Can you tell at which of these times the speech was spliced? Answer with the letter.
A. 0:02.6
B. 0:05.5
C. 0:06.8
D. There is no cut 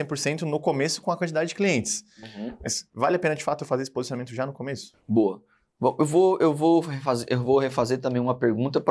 D